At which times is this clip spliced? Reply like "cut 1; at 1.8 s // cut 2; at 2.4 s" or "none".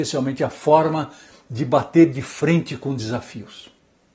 none

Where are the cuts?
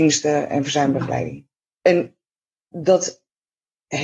cut 1; at 1.7 s

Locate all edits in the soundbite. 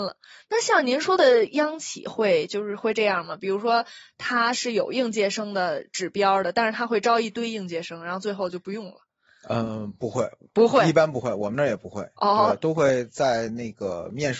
none

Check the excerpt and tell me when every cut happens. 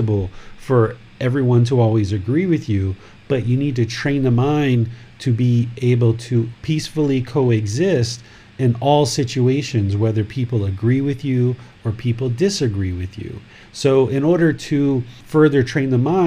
cut 1; at 13.6 s

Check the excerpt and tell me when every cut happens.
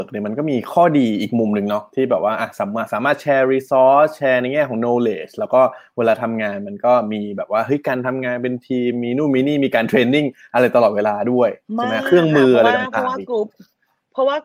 none

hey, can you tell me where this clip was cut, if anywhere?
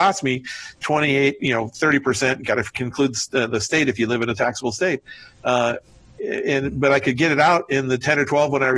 none

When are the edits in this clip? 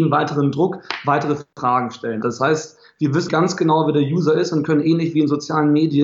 cut 1; at 2.2 s // cut 2; at 3.3 s

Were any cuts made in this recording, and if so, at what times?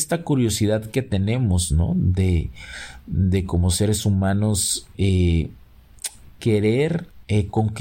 none

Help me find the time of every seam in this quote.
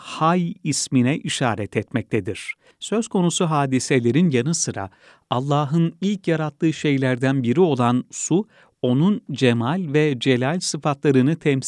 cut 1; at 2.7 s

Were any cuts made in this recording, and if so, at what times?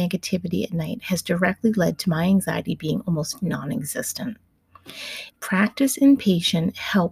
cut 1; at 5.3 s

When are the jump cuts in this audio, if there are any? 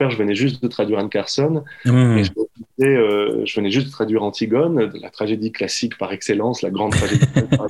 none

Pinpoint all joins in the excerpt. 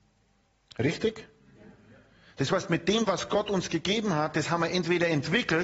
none

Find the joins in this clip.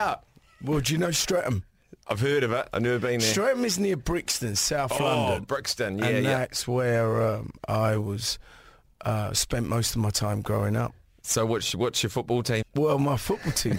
cut 1; at 12.6 s

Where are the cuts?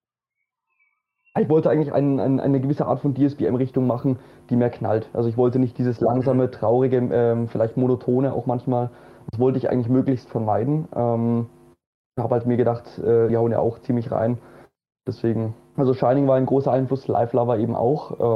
cut 1; at 13.3 s

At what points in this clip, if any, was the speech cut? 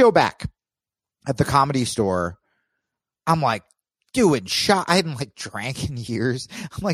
none

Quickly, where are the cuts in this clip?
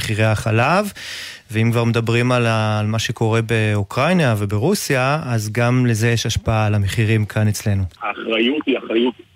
cut 1; at 8.0 s

